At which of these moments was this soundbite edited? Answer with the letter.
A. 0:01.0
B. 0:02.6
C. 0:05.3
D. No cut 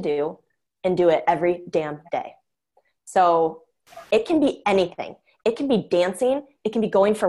D